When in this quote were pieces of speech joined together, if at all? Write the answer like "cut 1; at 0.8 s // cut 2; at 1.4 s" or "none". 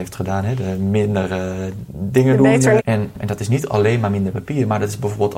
cut 1; at 2.8 s